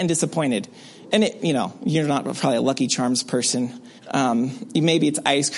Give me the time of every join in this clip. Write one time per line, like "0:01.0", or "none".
0:04.0